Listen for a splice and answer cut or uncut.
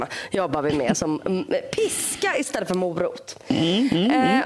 uncut